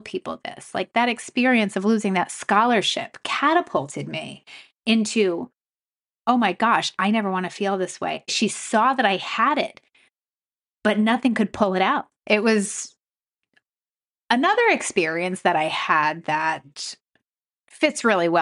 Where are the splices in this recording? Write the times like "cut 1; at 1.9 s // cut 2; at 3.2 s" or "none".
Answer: cut 1; at 8.3 s // cut 2; at 12.2 s